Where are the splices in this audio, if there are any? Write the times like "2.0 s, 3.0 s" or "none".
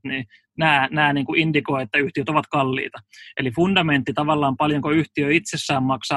none